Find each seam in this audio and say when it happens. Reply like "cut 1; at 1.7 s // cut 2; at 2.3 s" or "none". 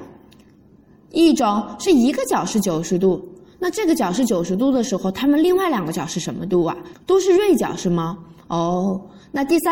cut 1; at 6.9 s